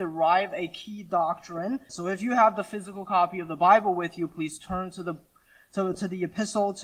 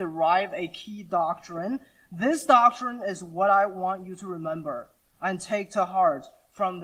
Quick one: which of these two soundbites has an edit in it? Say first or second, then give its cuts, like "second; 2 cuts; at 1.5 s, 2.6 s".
first; 1 cut; at 1.9 s